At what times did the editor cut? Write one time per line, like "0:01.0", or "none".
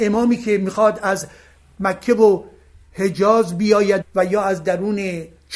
0:04.0